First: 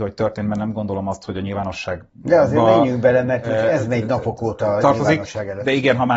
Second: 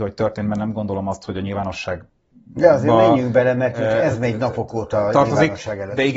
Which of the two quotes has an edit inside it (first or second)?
first